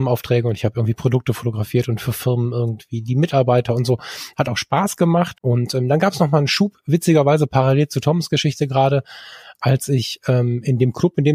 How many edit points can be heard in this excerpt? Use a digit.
2